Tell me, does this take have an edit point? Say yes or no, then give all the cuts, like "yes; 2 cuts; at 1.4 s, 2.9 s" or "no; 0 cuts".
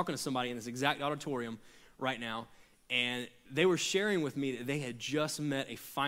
no; 0 cuts